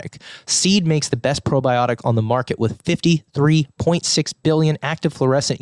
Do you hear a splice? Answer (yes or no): no